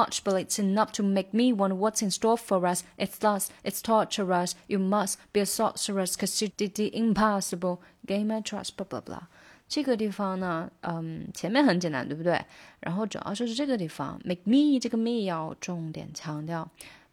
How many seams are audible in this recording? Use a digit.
1